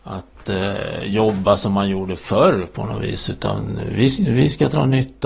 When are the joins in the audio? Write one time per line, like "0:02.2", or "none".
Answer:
none